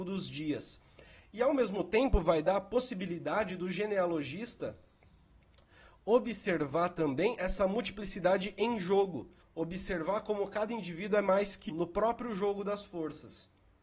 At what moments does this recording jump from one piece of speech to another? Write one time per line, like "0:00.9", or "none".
0:01.2
0:09.4
0:11.7

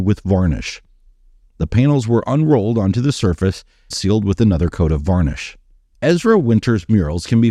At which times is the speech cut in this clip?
0:03.9
0:05.9

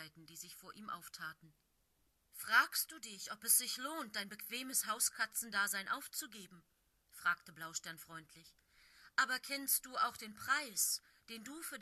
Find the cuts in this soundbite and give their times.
none

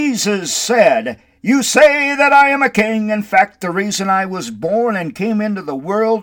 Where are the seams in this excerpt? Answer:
none

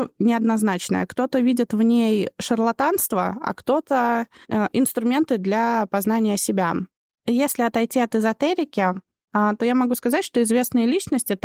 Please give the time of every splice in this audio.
none

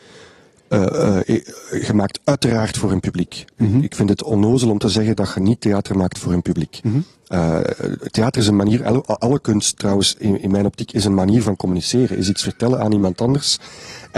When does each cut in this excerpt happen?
none

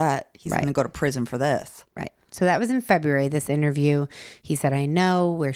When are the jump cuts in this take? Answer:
none

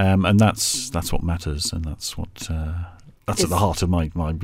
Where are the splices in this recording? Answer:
0:03.2

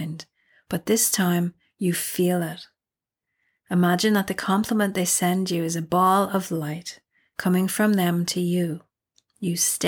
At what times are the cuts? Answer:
none

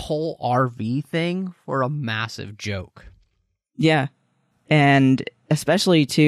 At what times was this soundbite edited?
0:04.5

